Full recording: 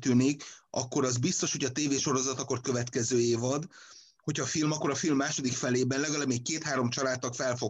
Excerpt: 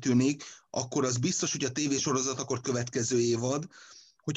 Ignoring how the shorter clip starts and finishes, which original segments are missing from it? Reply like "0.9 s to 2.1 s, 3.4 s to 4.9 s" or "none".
none